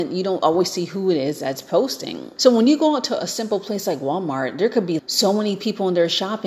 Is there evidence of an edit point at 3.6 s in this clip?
no; 2 cuts; at 2.4 s, 5.0 s

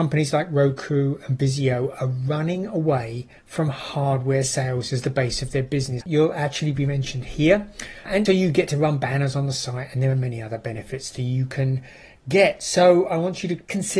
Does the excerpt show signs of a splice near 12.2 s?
no; 2 cuts; at 6.0 s, 8.3 s

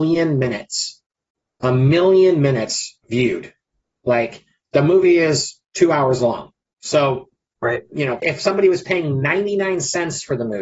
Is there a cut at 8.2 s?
yes; 2 cuts; at 3.0 s, 8.2 s

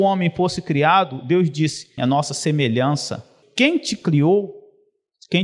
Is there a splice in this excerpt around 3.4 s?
yes; 2 cuts; at 2.0 s, 3.4 s

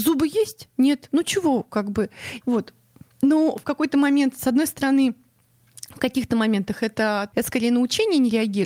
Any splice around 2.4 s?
yes; 2 cuts; at 2.4 s, 7.3 s

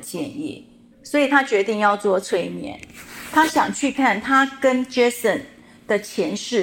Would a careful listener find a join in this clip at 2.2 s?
no; 2 cuts; at 0.9 s, 3.9 s

